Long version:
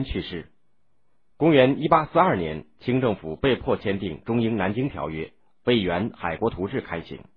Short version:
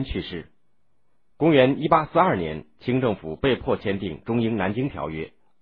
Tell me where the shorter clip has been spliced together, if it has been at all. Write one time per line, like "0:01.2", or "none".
none